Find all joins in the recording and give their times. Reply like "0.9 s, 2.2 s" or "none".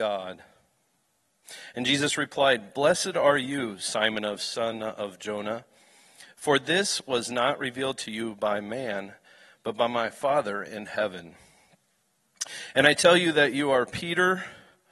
none

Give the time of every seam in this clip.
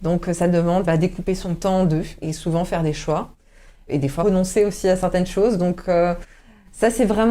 none

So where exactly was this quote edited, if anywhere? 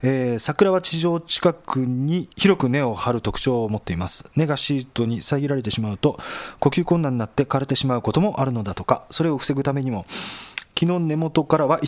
2.3 s

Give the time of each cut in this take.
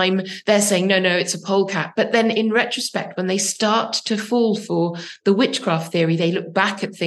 none

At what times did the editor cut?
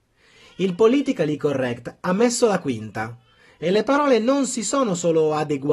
none

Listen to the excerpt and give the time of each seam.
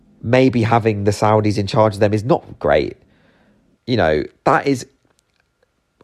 3.8 s

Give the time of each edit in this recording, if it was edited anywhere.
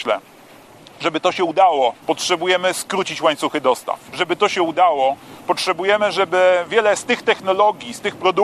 2.0 s, 4.1 s

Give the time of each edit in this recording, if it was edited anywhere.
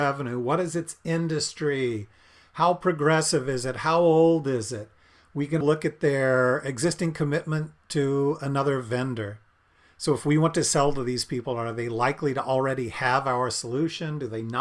5.6 s

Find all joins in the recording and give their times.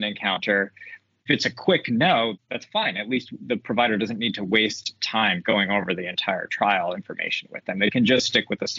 none

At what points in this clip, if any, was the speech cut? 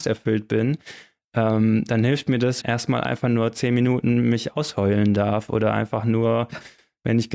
2.6 s

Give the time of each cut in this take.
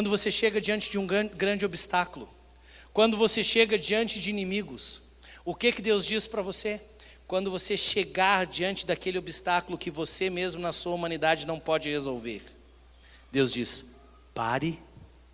none

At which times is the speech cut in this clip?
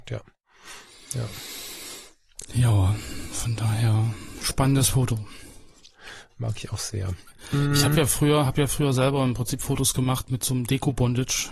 none

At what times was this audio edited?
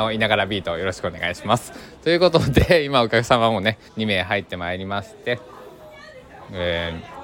3.9 s

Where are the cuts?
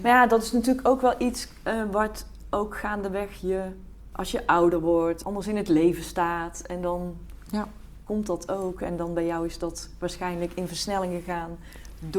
4.1 s, 5.2 s

